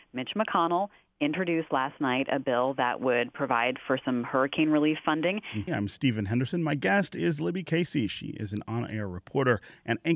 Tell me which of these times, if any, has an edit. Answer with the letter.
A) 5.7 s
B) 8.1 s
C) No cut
A